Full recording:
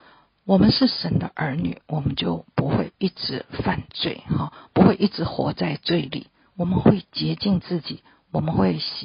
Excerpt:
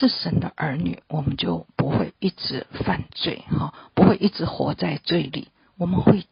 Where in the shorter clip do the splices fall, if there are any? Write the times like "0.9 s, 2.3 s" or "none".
none